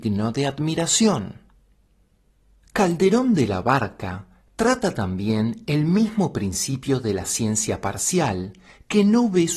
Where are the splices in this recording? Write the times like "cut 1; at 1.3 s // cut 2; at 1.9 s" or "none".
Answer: none